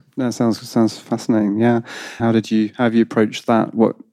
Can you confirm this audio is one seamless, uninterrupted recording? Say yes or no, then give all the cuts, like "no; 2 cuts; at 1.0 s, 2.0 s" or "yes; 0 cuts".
no; 1 cut; at 2.2 s